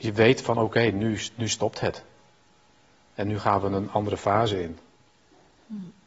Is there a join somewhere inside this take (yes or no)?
no